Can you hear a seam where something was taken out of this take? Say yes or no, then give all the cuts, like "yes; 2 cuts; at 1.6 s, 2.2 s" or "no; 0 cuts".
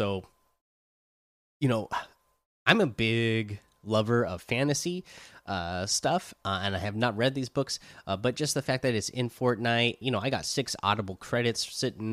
yes; 1 cut; at 10.0 s